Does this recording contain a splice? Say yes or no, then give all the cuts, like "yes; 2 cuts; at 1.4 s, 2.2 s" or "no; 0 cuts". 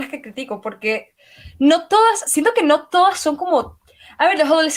no; 0 cuts